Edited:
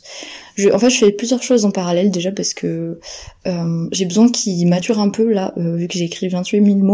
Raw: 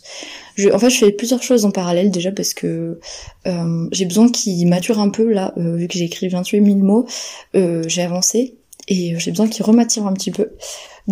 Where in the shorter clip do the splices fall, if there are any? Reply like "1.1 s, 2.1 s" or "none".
none